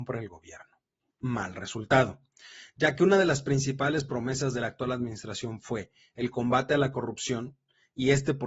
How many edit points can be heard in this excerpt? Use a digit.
1